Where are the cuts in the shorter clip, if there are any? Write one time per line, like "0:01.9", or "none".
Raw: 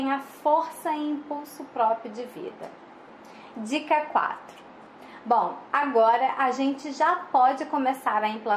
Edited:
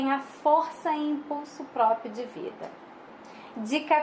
none